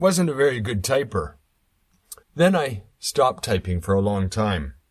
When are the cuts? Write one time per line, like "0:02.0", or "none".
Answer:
0:02.2